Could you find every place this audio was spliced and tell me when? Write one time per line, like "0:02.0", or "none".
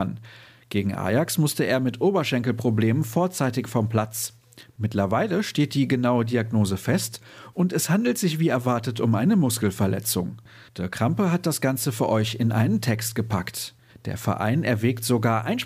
0:10.7
0:13.9